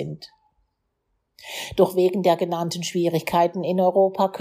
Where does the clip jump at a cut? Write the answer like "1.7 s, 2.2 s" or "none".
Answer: none